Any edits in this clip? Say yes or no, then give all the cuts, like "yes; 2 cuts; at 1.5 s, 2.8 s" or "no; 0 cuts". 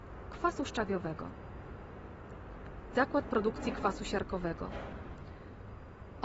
yes; 1 cut; at 2.9 s